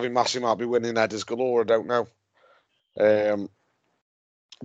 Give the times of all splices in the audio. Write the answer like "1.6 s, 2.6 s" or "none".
none